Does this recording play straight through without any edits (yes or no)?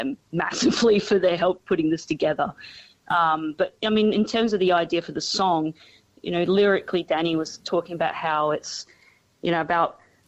yes